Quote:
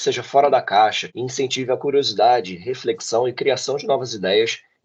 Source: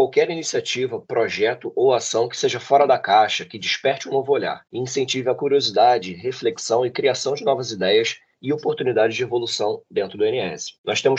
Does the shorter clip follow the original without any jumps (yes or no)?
no